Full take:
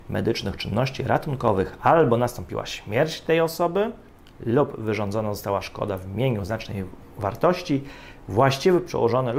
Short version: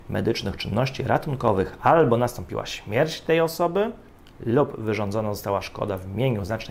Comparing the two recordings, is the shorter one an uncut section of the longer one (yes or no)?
yes